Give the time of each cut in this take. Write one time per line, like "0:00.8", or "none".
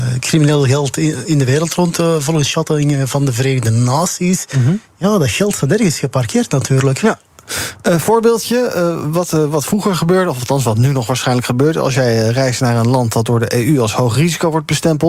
none

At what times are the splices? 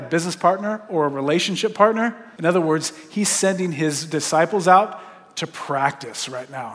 0:02.4

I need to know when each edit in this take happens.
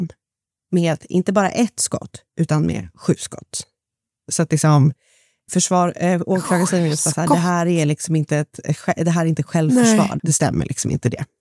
0:05.5
0:10.2

